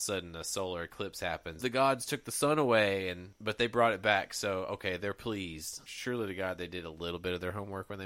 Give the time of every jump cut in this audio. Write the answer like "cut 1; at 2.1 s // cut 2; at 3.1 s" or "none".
cut 1; at 1.6 s // cut 2; at 5.8 s